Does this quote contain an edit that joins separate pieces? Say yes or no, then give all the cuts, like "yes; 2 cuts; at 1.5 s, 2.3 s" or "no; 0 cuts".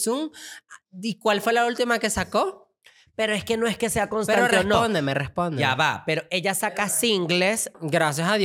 no; 0 cuts